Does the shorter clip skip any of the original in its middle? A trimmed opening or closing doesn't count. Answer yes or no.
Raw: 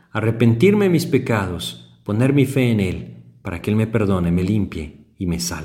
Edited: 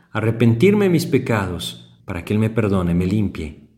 yes